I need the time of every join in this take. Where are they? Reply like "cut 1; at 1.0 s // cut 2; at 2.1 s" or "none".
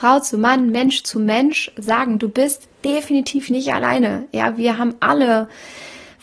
none

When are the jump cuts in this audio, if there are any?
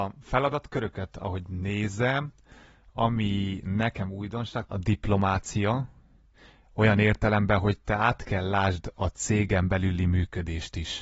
cut 1; at 4.6 s

